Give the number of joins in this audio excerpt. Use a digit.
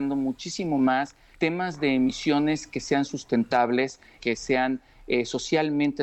1